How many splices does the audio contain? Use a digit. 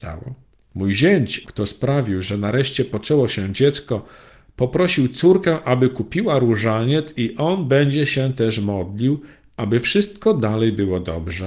1